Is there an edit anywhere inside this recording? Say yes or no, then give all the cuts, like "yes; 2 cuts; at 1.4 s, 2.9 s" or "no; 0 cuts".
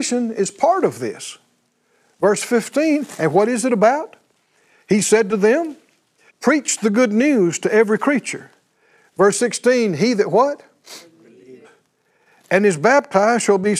yes; 2 cuts; at 6.3 s, 11.6 s